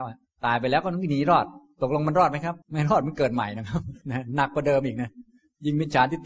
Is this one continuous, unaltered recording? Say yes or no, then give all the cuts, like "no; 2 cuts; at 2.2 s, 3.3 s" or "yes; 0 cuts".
no; 2 cuts; at 2.6 s, 4.0 s